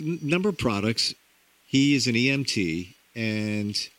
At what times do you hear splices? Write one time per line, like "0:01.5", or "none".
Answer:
0:01.6

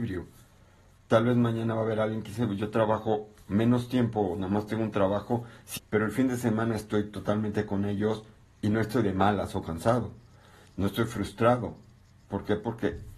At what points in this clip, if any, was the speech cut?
0:05.8

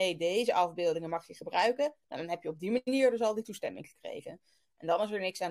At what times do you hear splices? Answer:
none

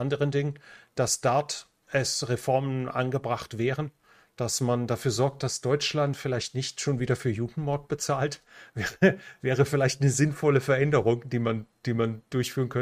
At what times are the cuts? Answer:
none

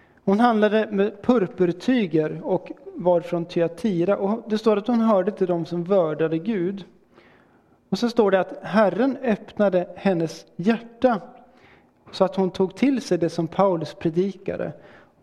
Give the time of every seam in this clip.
none

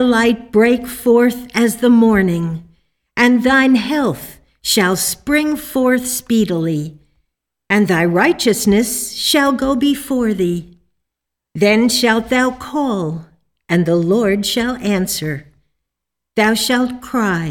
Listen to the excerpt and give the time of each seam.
0:11.4

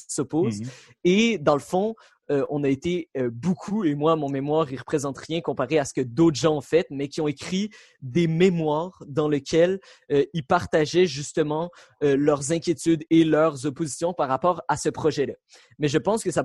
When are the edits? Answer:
none

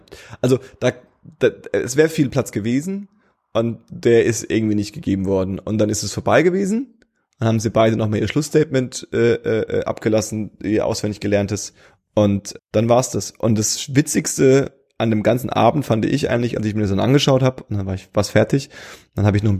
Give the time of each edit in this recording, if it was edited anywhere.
0:12.6

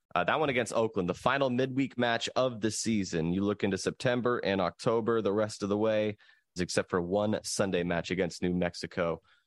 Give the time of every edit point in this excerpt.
0:06.6

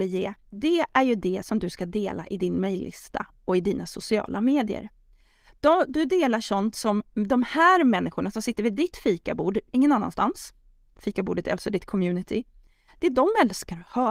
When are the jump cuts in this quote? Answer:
none

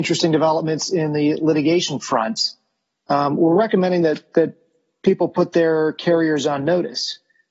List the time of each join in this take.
none

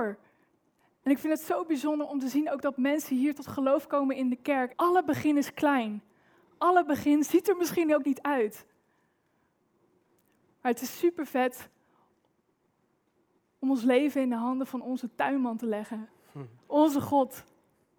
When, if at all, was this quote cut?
0:04.7

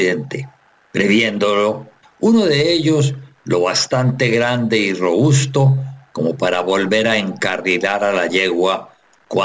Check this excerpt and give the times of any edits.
0:02.0

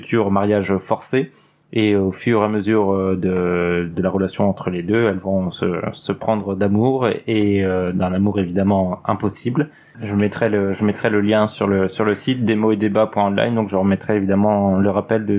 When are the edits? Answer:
0:09.9

